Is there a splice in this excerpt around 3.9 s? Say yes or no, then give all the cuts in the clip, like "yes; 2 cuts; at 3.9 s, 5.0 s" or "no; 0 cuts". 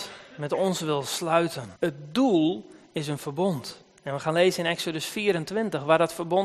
no; 1 cut; at 1.8 s